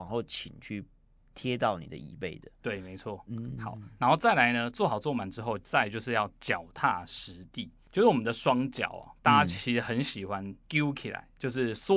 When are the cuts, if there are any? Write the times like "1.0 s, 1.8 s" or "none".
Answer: none